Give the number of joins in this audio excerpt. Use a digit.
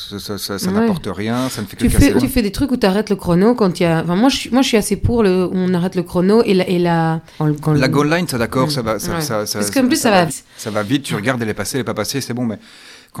3